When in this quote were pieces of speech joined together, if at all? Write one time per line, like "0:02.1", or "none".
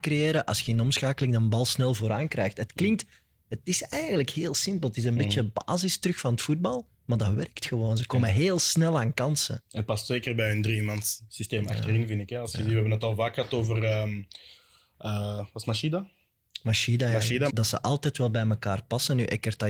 0:17.5